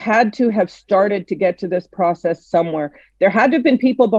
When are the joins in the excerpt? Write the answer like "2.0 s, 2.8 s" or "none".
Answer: none

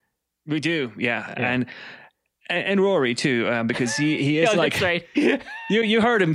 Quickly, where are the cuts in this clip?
none

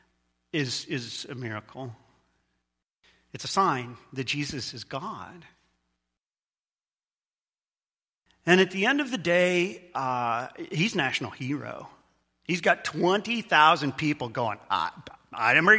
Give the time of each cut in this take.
none

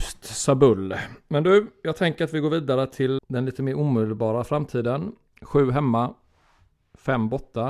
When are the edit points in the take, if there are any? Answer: 3.2 s, 5.3 s

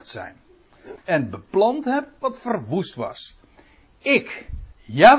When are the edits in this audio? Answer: 1.0 s

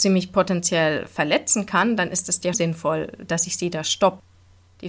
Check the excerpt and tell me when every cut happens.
2.5 s

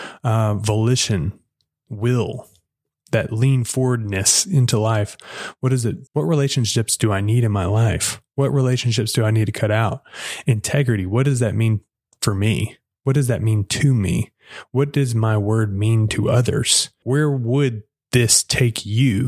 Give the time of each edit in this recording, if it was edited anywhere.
6.1 s, 17.0 s

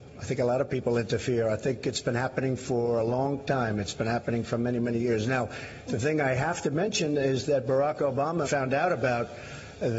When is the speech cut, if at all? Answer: 8.4 s

